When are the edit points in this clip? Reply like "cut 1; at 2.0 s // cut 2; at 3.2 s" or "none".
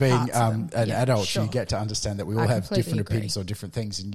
none